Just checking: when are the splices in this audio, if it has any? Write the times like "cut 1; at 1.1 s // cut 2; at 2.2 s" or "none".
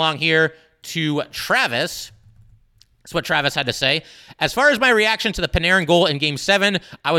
none